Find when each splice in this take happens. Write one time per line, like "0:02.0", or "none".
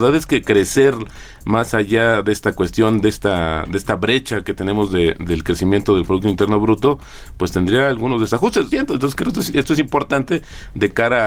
0:08.7